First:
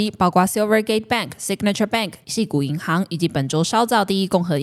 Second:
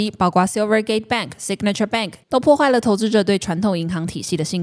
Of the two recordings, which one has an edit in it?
second; 1 cut; at 2.2 s

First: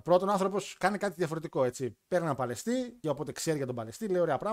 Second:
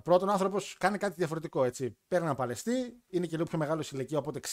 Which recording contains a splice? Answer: first; 1 cut; at 3.0 s

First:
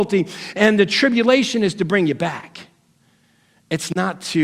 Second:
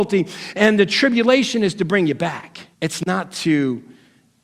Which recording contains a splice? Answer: second; 1 cut; at 2.7 s

